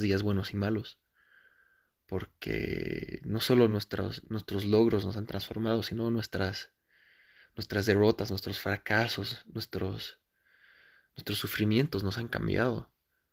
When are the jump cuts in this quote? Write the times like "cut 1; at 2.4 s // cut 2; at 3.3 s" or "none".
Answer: none